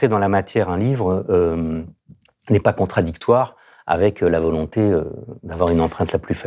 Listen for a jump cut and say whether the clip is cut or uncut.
uncut